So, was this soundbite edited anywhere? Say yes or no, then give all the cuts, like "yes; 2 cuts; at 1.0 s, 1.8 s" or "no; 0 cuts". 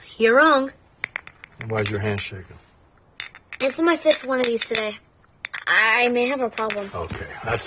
no; 0 cuts